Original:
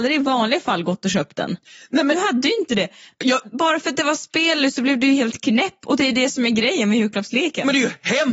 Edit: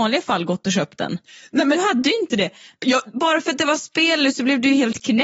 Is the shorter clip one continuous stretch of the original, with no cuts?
yes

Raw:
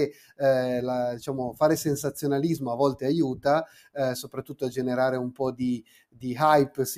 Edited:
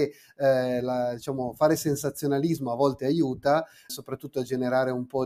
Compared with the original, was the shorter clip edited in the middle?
yes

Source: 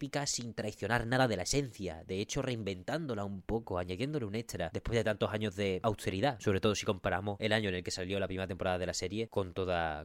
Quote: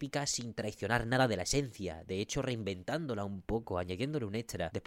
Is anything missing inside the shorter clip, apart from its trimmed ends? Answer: no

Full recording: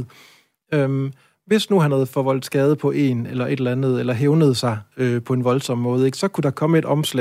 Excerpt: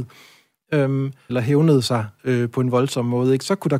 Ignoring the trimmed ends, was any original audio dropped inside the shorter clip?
yes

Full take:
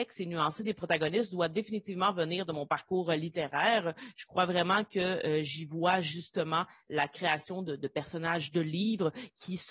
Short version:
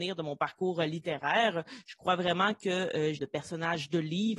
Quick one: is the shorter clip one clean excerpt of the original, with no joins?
no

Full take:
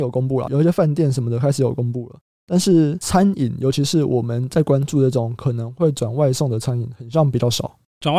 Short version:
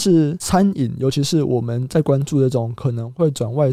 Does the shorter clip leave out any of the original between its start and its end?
no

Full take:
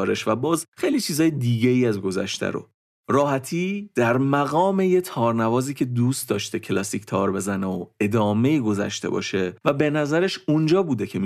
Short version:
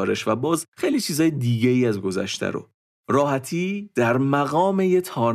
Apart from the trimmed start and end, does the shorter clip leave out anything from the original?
no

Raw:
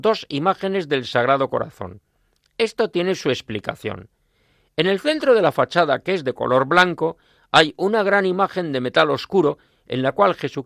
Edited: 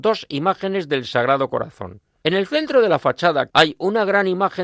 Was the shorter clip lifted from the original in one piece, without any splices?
no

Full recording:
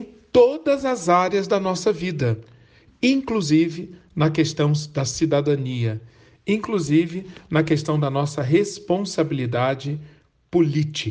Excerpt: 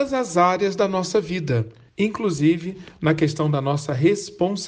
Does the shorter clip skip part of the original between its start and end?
yes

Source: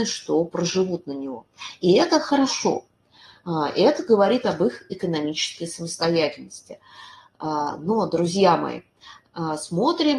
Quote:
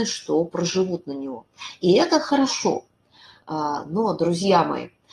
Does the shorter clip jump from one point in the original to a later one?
yes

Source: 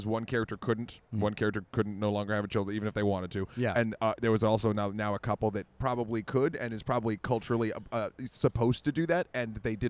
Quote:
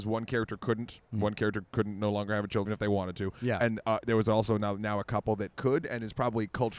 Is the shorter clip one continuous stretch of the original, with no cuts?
no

